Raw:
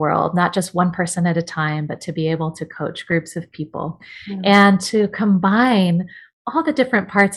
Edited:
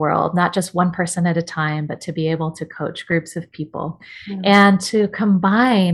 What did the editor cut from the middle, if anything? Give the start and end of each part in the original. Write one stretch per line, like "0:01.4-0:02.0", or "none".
none